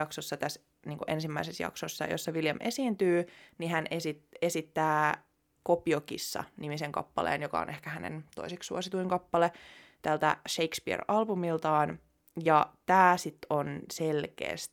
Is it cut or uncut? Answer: uncut